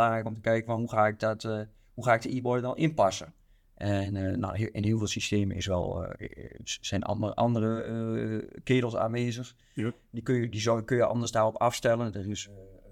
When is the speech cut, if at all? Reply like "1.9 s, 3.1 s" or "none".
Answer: none

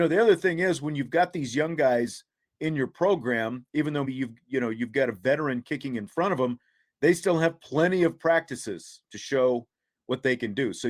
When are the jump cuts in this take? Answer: 4.0 s

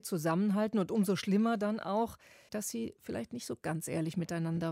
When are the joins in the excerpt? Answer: 2.5 s

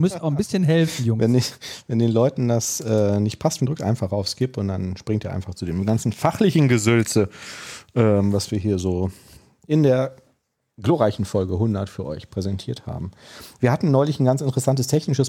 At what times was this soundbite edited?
3.6 s

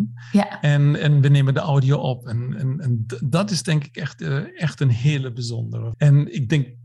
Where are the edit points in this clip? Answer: 5.9 s

